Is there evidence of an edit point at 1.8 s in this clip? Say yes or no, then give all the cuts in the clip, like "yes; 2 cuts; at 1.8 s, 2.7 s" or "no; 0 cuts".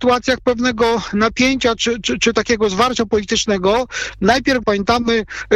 yes; 2 cuts; at 1.8 s, 4.6 s